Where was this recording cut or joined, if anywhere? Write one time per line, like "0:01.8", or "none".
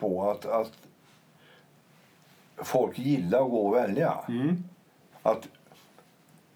0:05.1